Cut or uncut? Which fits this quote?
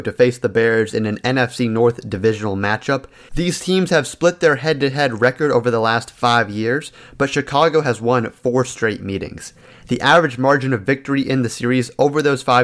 cut